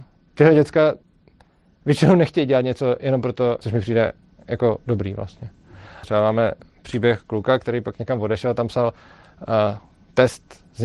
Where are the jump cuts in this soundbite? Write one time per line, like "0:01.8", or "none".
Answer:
0:03.6
0:06.0